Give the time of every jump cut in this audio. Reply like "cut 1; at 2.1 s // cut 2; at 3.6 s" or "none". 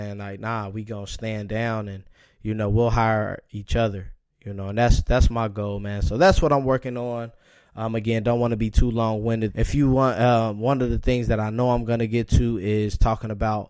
cut 1; at 9.5 s